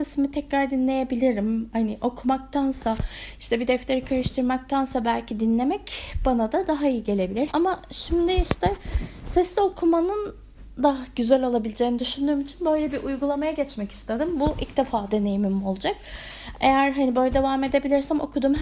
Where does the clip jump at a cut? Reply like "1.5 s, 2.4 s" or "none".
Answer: 7.5 s